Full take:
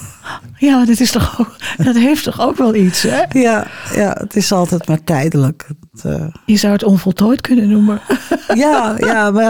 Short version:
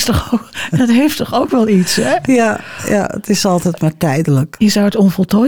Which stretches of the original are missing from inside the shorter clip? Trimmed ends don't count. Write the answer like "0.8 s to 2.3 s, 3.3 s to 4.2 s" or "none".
5.6 s to 6.4 s